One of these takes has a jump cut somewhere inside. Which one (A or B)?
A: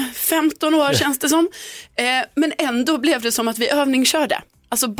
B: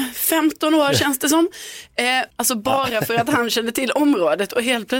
B